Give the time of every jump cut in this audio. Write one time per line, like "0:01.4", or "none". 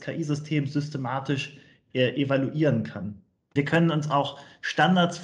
0:03.6